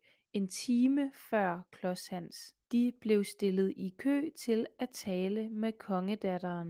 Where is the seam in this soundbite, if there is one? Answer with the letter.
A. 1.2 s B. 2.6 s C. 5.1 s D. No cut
B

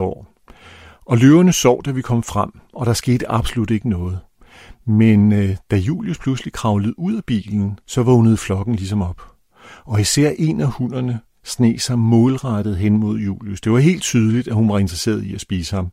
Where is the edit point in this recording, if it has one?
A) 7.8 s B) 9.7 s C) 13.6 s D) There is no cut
A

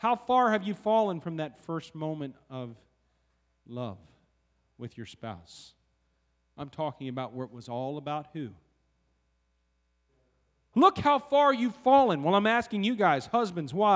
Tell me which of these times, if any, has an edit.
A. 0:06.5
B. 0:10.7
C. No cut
B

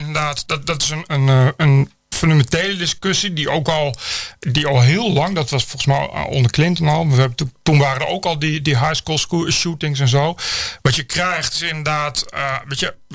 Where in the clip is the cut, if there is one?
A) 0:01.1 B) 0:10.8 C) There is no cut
A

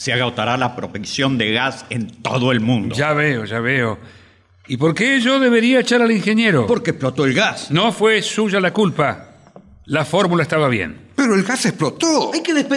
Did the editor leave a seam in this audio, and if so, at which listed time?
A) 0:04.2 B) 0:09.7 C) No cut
C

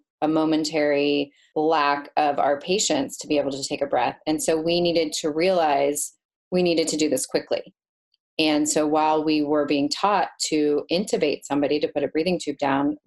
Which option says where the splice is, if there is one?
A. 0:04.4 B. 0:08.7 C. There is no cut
C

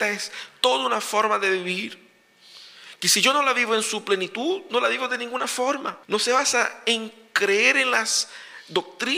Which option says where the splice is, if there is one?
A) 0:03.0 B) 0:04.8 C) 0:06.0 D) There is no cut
C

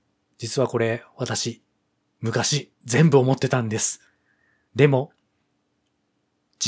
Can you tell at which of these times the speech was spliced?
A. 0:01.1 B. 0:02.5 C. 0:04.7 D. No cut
C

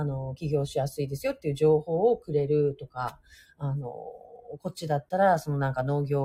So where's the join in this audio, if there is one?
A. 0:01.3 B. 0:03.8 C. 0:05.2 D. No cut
D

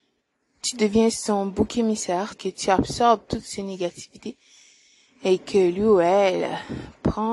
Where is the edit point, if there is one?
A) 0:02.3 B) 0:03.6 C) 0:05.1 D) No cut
A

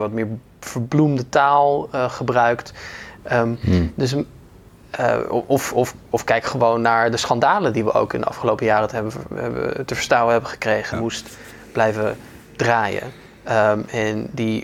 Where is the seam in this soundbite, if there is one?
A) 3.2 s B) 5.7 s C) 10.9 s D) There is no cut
C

